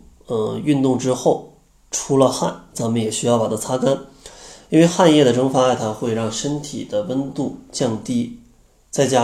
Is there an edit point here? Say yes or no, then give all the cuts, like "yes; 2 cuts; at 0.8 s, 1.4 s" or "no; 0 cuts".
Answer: no; 0 cuts